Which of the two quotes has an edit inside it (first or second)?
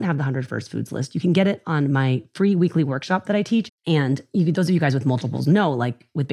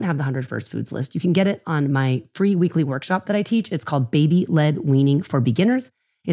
first